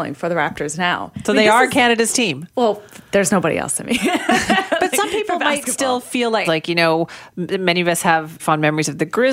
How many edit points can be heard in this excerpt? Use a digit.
2